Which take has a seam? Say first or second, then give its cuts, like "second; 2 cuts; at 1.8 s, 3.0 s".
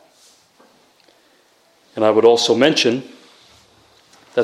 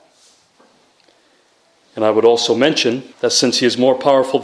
second; 1 cut; at 3.1 s